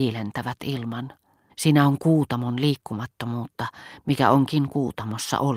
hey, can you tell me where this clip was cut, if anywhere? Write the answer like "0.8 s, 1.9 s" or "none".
1.5 s